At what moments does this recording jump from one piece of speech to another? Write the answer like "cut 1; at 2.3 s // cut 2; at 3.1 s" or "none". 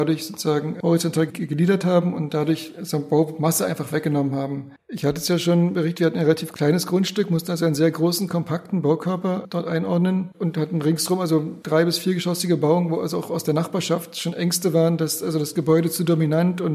cut 1; at 4.8 s